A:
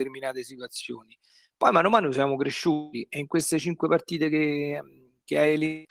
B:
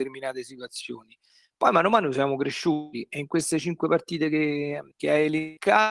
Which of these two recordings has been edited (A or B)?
B